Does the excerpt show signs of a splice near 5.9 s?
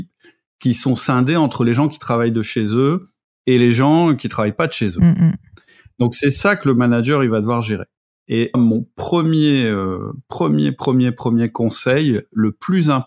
no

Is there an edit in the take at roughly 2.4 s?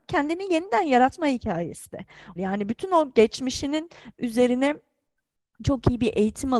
yes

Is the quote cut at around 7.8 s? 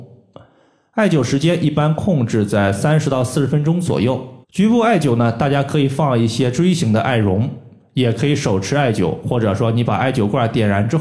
no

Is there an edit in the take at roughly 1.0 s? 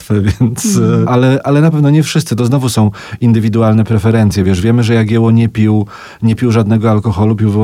yes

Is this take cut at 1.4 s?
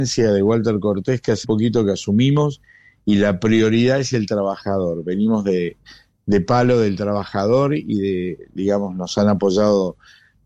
yes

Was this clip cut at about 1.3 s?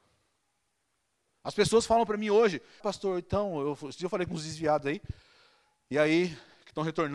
no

